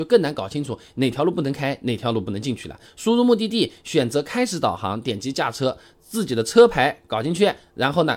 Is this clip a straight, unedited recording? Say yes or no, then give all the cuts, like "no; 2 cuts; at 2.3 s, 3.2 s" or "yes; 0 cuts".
no; 1 cut; at 2.8 s